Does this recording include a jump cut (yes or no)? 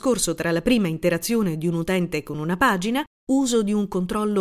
yes